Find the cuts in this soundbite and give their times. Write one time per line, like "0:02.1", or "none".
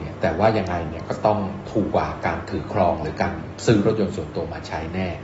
0:01.9